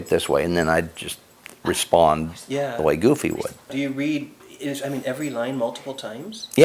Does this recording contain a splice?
no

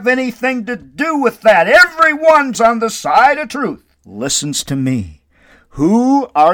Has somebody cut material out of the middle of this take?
yes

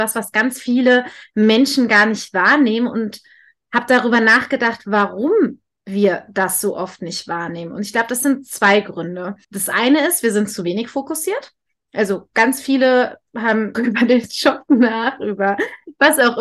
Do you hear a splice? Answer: yes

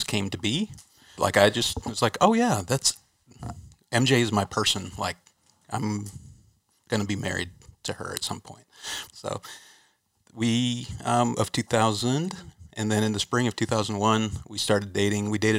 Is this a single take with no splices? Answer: no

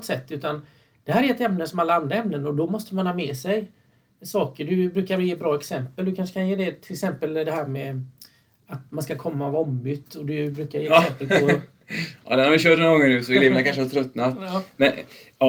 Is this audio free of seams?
yes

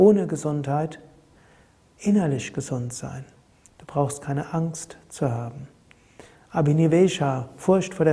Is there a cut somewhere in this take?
no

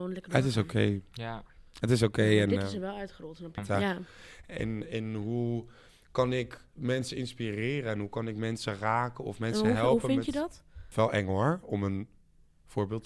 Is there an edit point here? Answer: yes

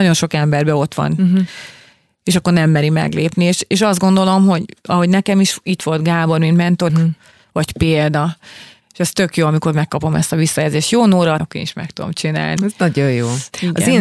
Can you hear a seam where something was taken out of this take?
yes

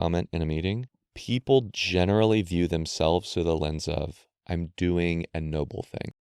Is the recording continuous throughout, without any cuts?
yes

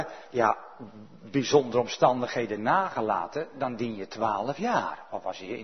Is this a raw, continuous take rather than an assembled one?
yes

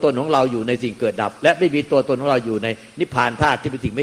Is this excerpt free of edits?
yes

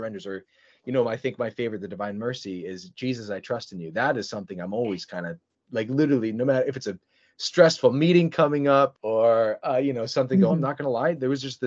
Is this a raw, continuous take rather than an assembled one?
no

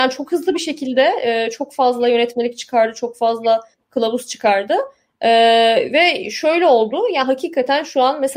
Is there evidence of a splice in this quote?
no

